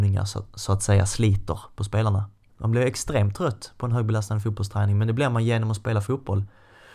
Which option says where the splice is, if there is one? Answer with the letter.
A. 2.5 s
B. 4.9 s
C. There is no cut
A